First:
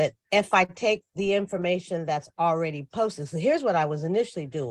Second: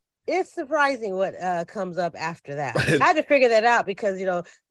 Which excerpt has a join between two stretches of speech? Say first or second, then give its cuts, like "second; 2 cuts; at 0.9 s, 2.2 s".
second; 1 cut; at 3.0 s